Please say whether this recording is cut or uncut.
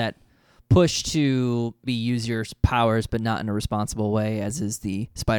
cut